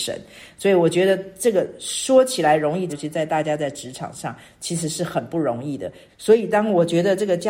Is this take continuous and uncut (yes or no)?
no